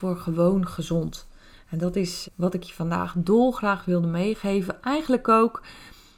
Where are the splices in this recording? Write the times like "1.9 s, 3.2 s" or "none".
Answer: 2.2 s